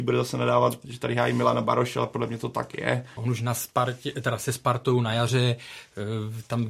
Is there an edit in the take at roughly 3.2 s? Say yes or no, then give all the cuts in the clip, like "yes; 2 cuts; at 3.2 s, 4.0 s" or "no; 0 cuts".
yes; 1 cut; at 3.2 s